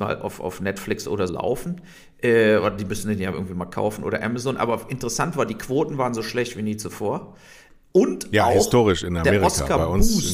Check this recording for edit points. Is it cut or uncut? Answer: cut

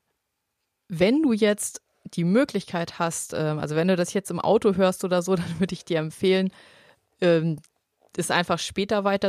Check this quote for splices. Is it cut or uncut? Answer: uncut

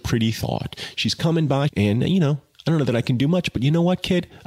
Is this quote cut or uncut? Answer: cut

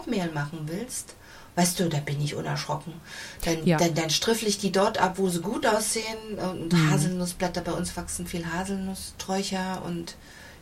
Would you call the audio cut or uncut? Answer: uncut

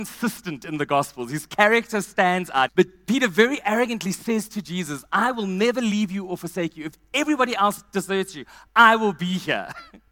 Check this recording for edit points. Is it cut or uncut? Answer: cut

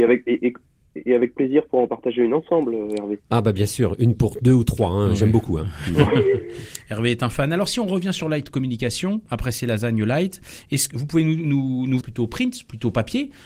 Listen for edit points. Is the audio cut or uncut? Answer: cut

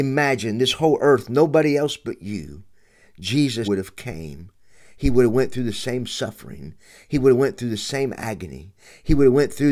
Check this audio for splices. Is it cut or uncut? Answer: cut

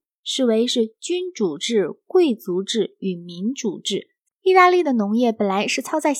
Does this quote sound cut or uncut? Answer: cut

